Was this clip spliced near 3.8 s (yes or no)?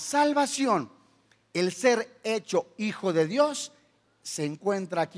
no